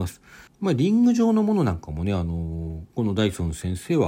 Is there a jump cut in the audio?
yes; 1 cut; at 2.9 s

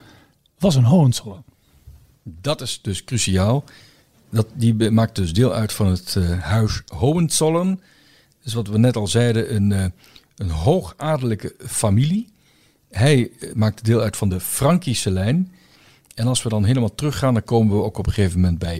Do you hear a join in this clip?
no; 0 cuts

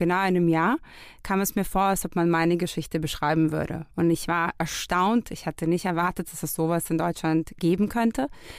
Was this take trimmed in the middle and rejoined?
no; 0 cuts

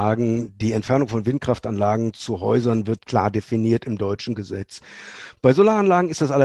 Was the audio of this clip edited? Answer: no; 0 cuts

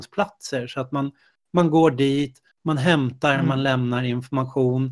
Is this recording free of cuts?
yes; 0 cuts

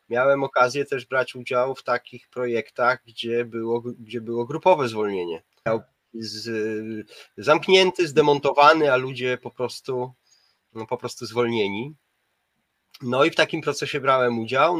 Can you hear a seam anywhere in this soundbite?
yes; 1 cut; at 5.7 s

